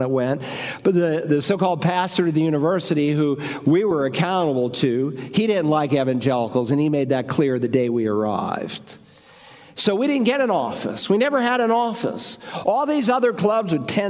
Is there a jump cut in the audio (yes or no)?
no